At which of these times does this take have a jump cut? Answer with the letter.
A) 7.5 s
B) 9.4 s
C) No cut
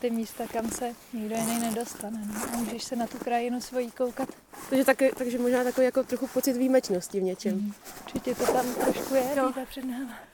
B